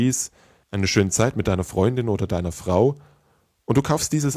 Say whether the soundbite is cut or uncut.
uncut